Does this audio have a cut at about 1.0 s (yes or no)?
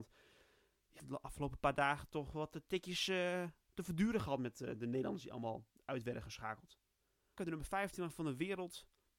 yes